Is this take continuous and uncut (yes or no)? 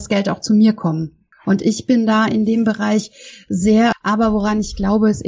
no